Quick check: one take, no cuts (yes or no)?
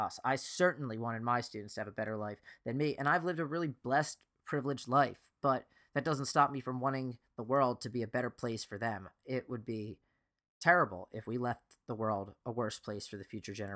yes